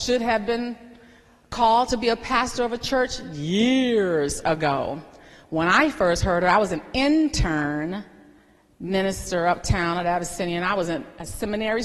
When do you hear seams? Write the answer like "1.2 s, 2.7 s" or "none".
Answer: none